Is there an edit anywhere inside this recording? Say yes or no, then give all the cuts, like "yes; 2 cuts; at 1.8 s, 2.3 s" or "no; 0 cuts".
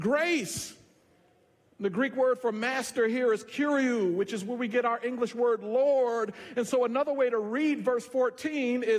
no; 0 cuts